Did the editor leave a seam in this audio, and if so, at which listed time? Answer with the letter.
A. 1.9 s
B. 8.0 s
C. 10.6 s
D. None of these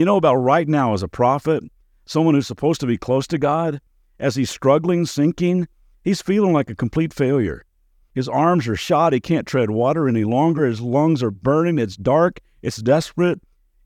C